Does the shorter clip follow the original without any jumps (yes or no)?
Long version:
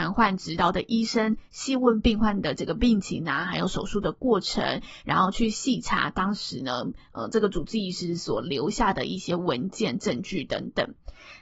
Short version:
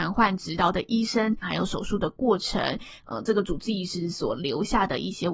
no